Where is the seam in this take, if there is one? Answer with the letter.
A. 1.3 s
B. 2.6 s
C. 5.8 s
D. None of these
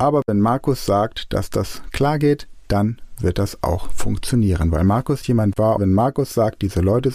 C